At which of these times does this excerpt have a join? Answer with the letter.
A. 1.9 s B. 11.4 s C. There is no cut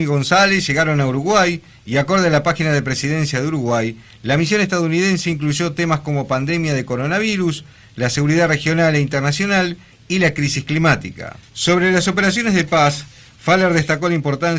B